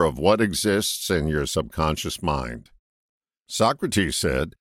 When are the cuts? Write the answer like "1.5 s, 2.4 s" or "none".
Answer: none